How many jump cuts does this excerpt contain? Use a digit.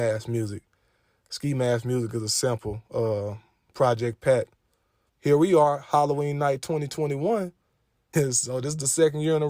2